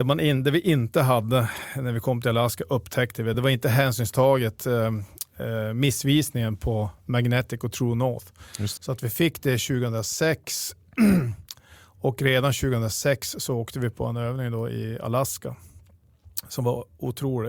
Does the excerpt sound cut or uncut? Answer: cut